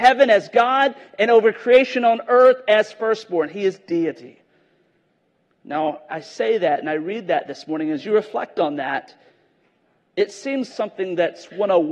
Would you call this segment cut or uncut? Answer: cut